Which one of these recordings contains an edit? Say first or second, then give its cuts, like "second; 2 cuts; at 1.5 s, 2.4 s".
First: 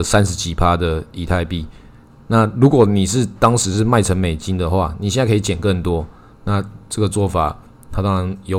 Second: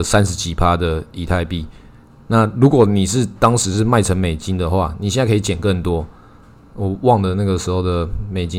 first; 1 cut; at 6.3 s